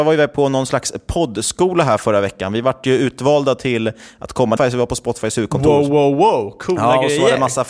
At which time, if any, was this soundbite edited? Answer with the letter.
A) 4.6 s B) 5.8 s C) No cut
A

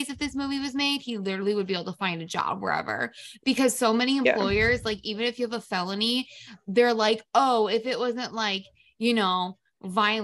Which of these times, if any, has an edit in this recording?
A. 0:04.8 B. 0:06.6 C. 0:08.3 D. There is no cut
D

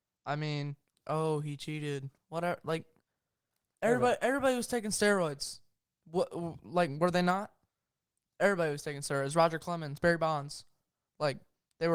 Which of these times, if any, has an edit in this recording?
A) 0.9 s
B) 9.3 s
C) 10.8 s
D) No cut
A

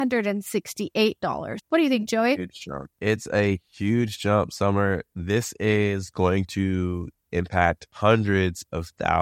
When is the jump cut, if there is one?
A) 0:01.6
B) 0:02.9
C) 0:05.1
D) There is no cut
A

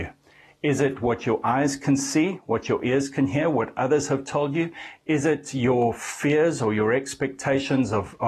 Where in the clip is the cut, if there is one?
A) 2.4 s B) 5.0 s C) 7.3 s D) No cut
D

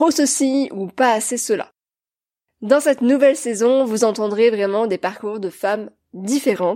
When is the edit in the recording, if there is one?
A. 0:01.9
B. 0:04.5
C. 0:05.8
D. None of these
D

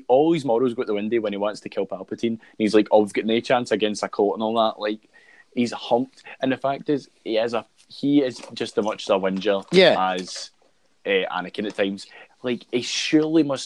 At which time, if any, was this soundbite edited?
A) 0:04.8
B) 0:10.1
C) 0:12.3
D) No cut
C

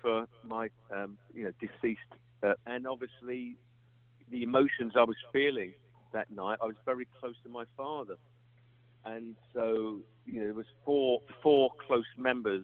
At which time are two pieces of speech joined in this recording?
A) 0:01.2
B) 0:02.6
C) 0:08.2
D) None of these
B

